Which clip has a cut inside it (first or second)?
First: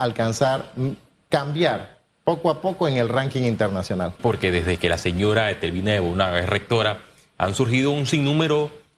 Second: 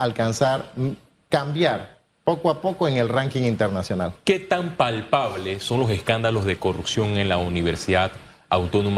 first